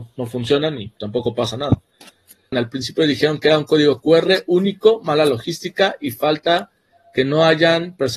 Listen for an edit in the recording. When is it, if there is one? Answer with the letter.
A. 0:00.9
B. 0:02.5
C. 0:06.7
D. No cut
B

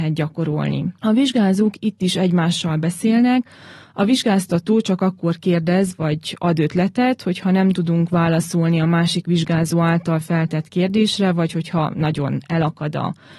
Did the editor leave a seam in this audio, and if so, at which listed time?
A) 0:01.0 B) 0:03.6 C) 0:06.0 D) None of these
A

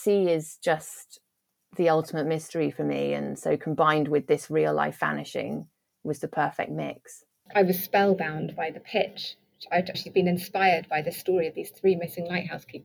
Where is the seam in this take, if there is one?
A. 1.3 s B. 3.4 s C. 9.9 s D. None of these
C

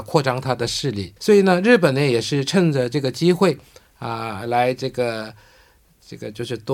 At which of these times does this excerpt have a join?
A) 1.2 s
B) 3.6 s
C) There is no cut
A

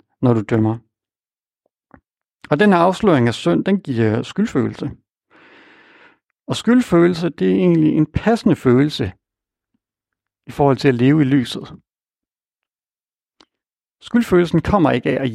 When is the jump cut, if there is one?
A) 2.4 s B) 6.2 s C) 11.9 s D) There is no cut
D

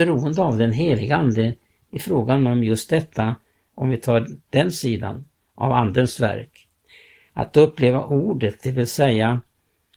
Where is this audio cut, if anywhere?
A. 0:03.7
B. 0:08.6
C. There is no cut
A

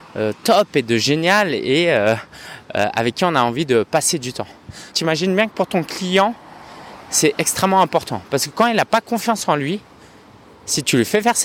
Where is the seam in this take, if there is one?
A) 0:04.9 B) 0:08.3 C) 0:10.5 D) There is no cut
A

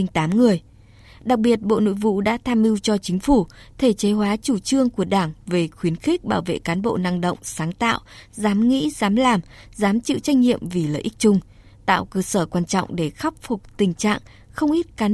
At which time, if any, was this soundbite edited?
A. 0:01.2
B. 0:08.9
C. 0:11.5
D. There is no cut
D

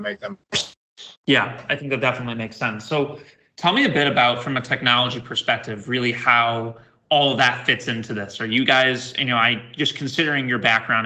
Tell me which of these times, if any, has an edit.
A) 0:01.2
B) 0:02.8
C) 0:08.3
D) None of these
A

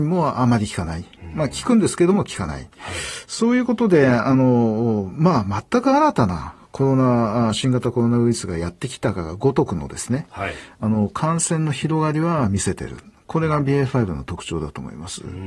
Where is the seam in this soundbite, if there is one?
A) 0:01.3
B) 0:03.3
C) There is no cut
C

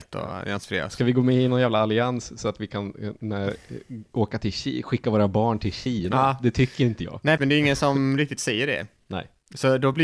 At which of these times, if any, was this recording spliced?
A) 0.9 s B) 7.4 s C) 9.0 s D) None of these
B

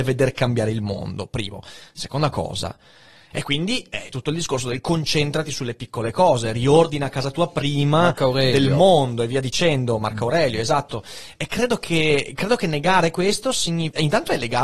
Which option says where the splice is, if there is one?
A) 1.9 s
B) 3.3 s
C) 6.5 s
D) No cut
B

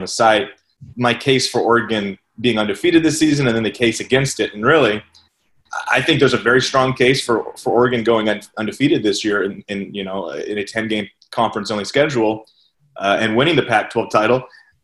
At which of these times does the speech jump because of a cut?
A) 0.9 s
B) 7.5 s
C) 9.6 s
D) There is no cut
A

